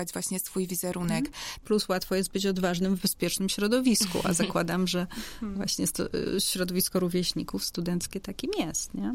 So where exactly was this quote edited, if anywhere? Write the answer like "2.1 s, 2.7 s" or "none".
1.6 s